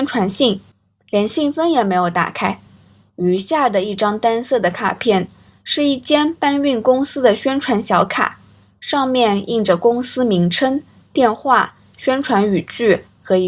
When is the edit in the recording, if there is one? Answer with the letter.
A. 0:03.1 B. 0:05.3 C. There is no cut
C